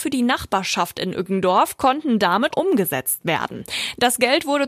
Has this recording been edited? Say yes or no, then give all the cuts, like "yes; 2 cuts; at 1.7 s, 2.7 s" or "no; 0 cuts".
yes; 1 cut; at 2.5 s